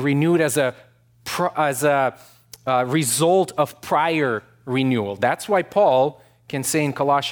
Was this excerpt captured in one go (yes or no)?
yes